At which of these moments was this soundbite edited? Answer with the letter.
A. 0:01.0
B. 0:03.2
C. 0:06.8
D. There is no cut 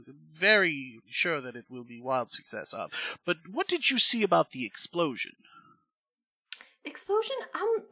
A